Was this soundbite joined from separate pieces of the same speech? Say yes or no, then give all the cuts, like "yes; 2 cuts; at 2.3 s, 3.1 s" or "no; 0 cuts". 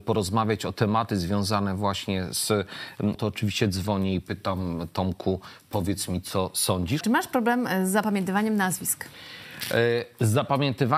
yes; 2 cuts; at 3.1 s, 7.0 s